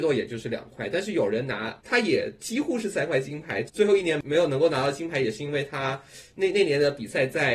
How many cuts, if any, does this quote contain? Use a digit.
1